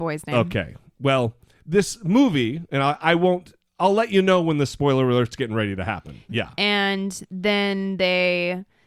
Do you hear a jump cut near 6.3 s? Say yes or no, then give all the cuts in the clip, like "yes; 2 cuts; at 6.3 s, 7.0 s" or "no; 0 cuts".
yes; 1 cut; at 6.3 s